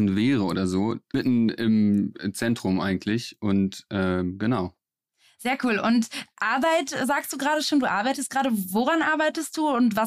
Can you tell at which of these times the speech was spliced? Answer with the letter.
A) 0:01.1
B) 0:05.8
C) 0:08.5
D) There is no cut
A